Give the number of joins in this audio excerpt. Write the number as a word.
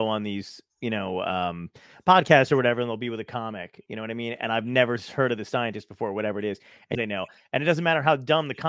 one